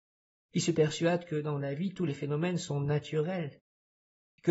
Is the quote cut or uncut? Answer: uncut